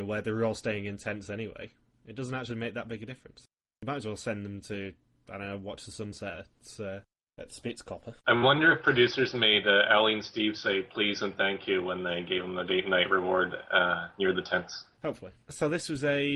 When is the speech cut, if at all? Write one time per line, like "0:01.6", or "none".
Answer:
none